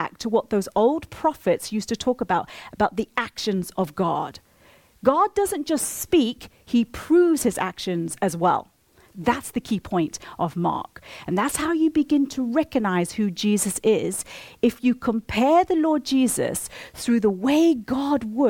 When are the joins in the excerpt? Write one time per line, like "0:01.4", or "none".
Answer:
0:09.1